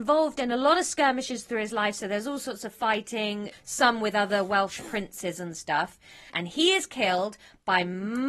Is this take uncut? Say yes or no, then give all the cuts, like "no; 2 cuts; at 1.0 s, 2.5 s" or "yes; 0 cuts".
no; 2 cuts; at 3.5 s, 6.3 s